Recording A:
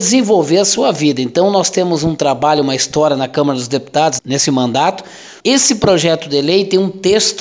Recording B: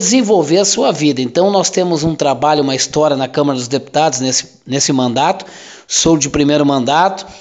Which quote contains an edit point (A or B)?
A